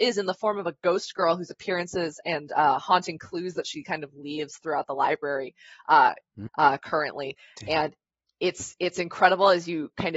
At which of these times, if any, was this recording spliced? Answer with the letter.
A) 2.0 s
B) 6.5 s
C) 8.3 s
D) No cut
B